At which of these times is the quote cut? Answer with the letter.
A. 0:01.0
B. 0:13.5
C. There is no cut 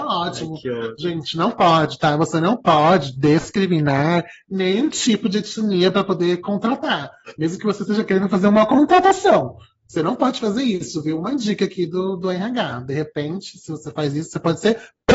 C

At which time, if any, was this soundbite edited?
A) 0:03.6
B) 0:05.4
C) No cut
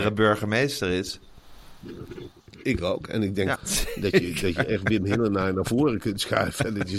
A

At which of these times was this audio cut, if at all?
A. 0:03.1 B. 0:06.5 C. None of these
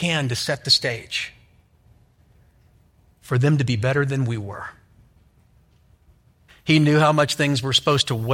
B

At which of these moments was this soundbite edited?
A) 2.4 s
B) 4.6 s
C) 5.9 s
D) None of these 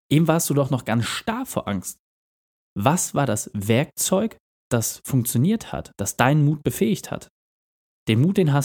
C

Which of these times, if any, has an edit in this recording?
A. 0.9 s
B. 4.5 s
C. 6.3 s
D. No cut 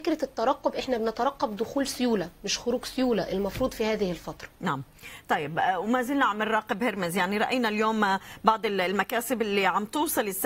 B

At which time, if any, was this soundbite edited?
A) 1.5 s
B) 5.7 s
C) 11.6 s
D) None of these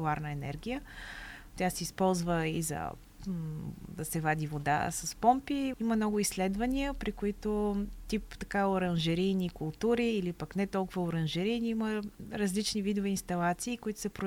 B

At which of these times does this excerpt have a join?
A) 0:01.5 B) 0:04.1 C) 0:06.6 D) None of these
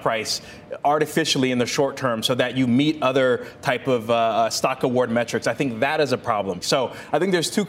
C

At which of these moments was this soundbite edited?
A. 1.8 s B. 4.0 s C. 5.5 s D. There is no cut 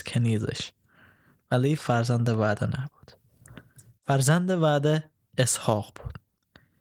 A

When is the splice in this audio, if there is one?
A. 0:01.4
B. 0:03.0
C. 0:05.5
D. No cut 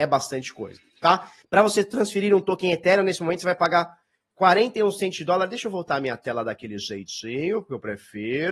A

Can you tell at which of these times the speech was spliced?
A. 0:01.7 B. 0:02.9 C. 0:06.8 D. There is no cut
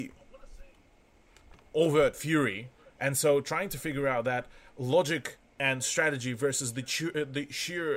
B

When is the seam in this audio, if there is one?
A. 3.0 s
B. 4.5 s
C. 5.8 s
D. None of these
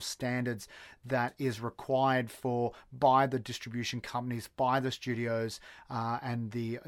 D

